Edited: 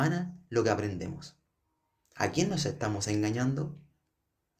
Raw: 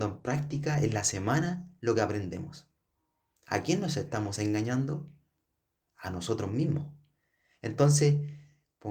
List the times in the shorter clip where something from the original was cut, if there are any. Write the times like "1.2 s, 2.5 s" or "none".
none

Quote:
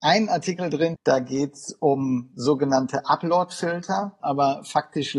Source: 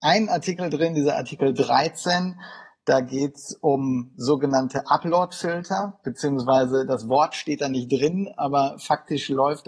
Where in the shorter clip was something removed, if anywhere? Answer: 0.9 s, 4.2 s

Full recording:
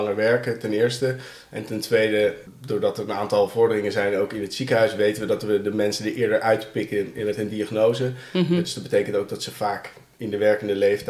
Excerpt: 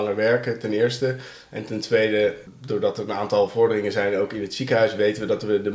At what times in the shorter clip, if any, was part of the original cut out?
none

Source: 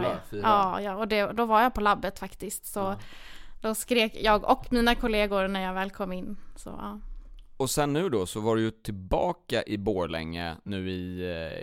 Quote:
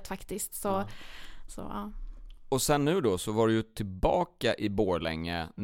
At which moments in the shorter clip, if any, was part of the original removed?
1.5 s

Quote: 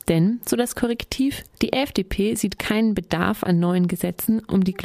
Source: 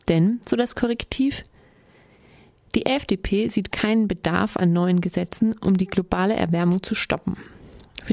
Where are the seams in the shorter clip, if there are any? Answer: 1.5 s

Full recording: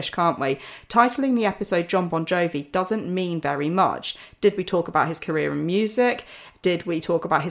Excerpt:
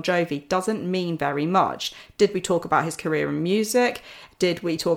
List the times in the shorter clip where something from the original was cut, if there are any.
none

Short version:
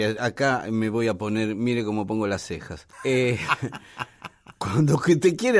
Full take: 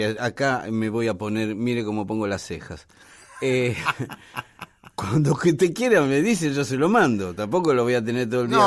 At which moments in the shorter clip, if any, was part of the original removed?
2.9 s

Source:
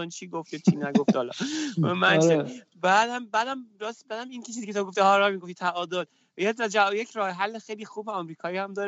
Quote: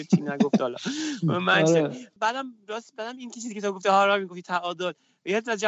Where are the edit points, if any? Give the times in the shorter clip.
2.2 s

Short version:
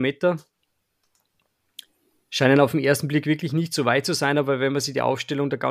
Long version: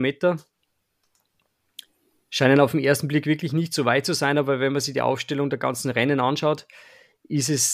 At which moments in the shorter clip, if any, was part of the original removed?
none

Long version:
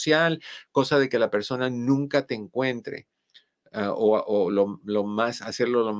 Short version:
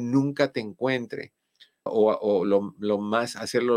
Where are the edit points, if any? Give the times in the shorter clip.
1.9 s

